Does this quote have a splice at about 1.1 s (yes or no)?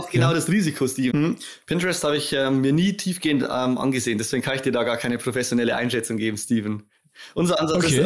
yes